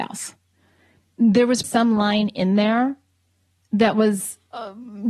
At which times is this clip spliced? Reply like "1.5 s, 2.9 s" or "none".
1.6 s